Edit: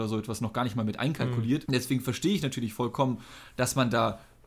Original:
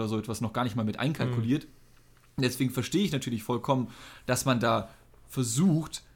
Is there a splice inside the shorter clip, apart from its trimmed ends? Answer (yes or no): yes